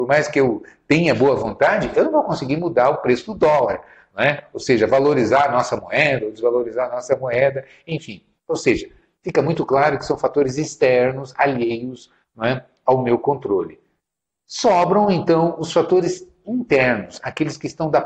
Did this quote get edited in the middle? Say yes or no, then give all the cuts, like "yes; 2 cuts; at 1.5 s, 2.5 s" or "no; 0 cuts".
no; 0 cuts